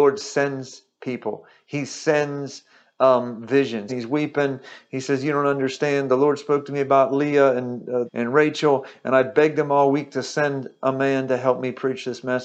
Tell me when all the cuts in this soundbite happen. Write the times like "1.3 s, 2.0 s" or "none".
3.9 s, 8.1 s